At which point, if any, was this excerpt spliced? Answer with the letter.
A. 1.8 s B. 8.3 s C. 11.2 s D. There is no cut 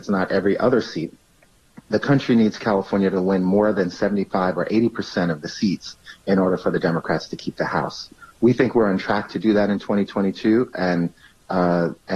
A